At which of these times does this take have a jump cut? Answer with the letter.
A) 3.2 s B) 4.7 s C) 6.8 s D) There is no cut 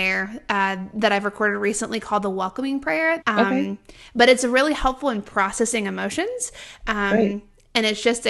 A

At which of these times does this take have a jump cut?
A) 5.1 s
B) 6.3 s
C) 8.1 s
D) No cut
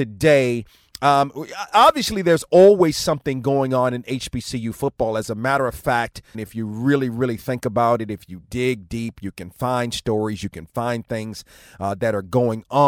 B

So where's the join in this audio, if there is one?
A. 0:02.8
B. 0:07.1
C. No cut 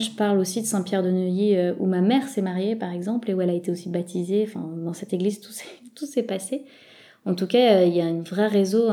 C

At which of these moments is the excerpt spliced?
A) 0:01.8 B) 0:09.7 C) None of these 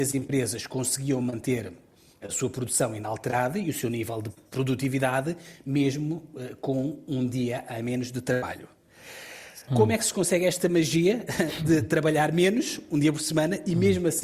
B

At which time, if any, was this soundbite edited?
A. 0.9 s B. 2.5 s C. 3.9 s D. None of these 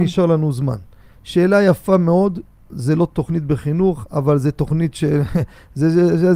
D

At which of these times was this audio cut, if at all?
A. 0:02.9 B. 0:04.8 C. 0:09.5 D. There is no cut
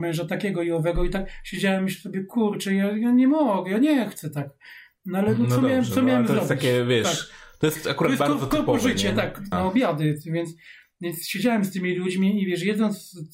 C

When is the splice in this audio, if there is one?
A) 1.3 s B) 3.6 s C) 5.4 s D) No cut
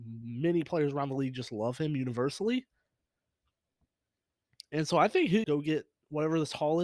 C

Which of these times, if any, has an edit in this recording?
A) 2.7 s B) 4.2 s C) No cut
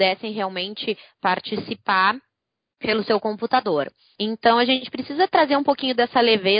B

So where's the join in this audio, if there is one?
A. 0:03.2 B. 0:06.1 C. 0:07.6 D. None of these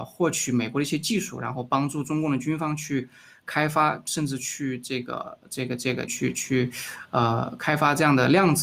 B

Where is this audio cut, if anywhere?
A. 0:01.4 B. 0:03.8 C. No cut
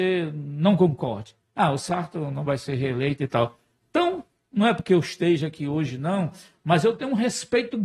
B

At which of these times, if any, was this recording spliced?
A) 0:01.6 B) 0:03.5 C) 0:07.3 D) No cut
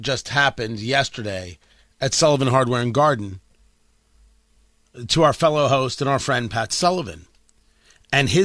D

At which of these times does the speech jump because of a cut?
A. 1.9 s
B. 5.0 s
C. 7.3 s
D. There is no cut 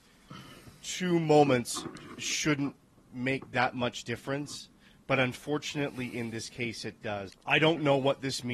C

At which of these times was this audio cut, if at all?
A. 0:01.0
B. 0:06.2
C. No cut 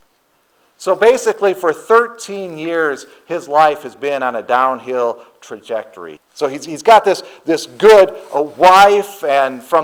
B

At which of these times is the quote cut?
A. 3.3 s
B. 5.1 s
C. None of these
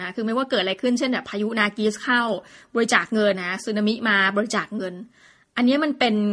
A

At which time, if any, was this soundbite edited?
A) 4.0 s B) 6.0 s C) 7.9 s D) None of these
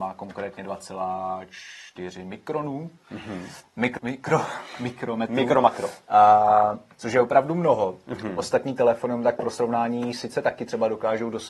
A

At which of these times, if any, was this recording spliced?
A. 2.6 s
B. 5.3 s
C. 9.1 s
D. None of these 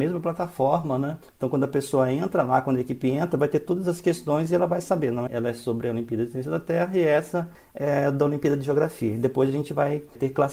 B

